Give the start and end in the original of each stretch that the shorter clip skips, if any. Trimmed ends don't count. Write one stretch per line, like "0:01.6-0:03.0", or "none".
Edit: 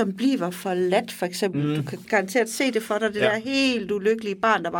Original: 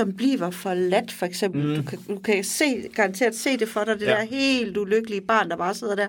0:02.0-0:02.9